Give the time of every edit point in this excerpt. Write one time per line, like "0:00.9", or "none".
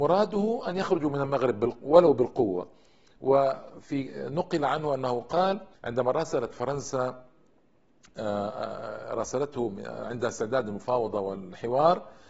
0:05.7

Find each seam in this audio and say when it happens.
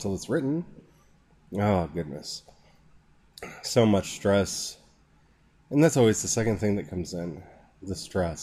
none

